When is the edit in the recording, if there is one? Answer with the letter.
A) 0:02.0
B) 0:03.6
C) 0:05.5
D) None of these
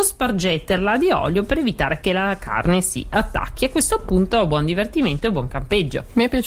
D